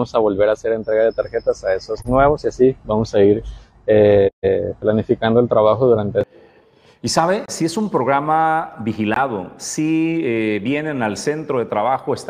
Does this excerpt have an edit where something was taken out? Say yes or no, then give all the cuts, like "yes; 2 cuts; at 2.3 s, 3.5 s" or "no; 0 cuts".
no; 0 cuts